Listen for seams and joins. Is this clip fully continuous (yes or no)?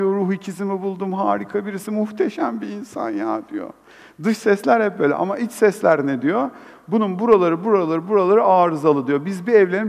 yes